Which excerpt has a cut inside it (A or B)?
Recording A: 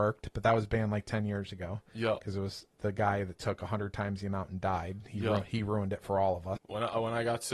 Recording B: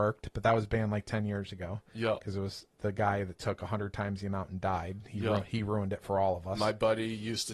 A